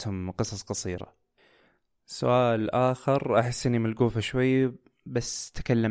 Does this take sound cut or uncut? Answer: uncut